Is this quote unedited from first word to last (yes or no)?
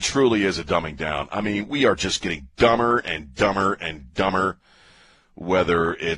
yes